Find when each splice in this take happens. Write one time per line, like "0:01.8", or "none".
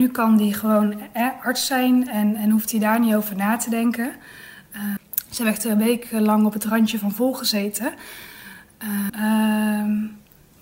0:05.0
0:09.1